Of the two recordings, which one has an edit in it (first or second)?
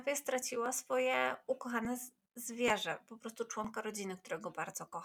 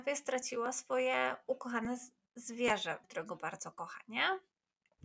second